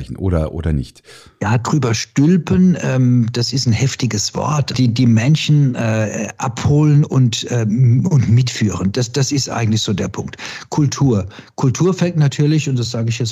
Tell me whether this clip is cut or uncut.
cut